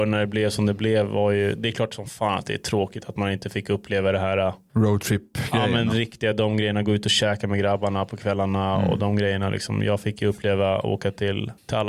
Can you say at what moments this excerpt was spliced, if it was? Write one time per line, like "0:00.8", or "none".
none